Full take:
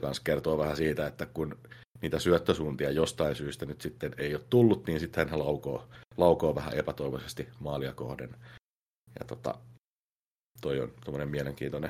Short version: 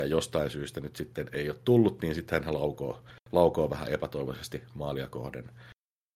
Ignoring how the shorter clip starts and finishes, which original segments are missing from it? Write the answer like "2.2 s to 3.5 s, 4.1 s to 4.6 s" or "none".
none